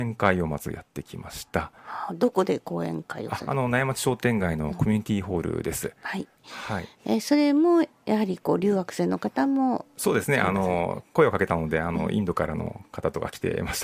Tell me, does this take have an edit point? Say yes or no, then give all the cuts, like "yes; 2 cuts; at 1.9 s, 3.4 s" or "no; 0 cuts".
no; 0 cuts